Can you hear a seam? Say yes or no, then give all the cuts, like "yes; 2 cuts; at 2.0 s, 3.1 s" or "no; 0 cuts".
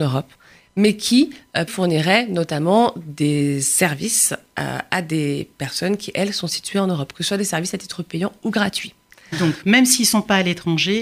yes; 1 cut; at 1.7 s